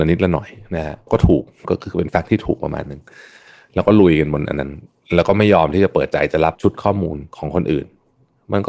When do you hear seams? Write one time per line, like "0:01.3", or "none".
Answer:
0:01.1

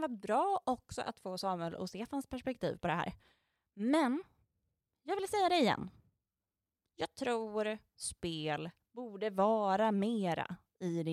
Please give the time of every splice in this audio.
none

